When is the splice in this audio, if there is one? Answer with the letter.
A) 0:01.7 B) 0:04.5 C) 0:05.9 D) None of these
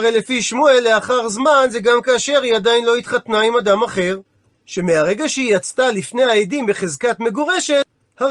B